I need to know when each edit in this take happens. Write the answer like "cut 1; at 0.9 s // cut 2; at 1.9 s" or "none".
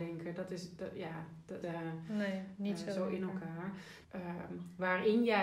cut 1; at 1.6 s // cut 2; at 4.0 s

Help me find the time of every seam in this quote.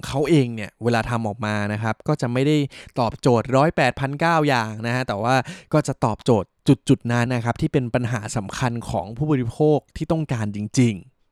cut 1; at 7.3 s

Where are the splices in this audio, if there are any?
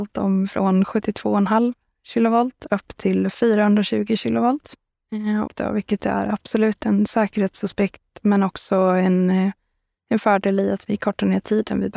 cut 1; at 5.5 s

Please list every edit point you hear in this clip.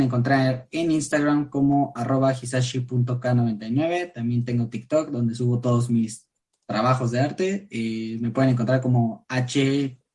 none

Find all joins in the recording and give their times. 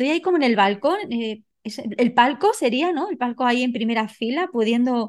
none

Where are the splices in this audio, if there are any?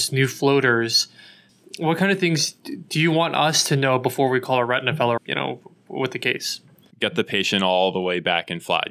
cut 1; at 5.2 s // cut 2; at 6.9 s

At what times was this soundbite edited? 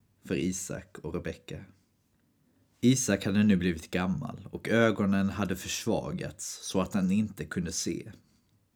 none

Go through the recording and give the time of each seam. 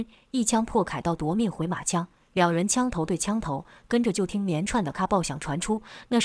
cut 1; at 4.9 s

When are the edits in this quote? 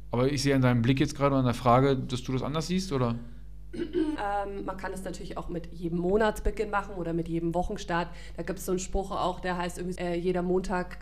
cut 1; at 4.2 s // cut 2; at 10.0 s

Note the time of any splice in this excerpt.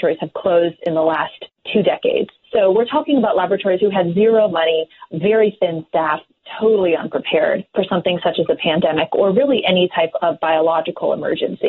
none

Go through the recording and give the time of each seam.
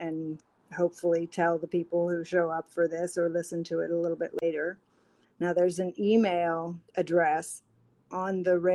cut 1; at 5.2 s // cut 2; at 6.9 s

